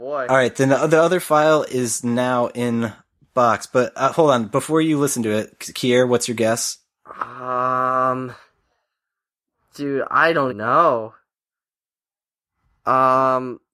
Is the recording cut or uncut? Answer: cut